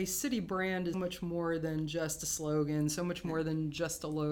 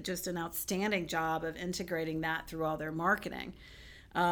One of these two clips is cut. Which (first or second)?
first